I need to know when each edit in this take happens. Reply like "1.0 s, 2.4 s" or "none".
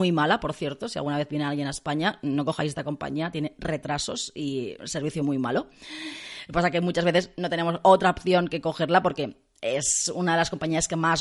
5.2 s